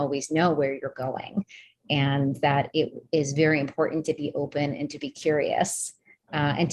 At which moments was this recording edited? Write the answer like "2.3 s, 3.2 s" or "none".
none